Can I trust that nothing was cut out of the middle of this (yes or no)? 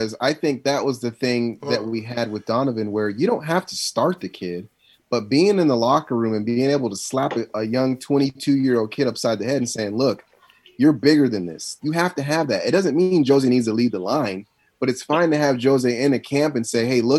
no